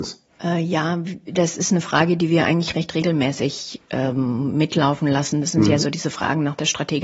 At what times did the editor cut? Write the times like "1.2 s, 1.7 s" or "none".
none